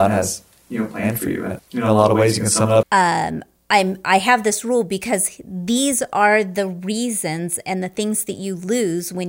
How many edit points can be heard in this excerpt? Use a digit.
2